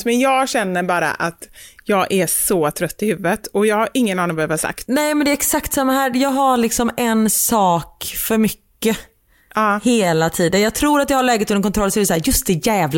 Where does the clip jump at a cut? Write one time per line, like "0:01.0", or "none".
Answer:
none